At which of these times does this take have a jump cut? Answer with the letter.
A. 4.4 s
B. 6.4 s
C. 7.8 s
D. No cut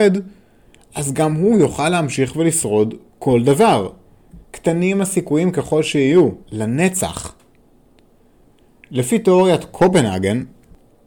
B